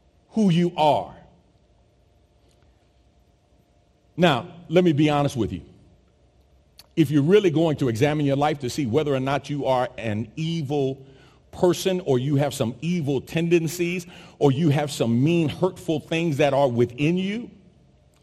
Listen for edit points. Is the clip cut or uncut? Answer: uncut